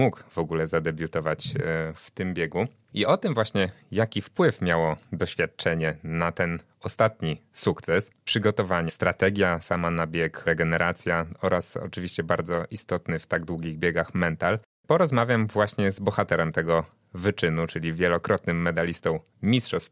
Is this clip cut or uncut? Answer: cut